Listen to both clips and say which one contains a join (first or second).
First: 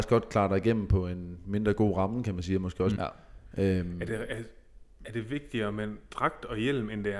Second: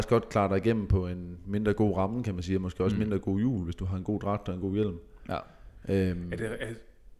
first